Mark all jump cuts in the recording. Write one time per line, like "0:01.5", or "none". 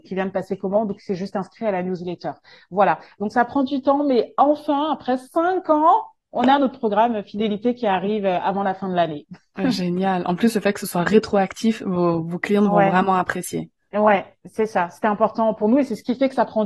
none